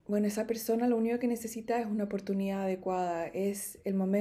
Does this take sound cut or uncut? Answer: uncut